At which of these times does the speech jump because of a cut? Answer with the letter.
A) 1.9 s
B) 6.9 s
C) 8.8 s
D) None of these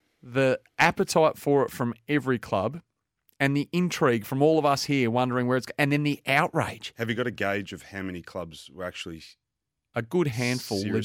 D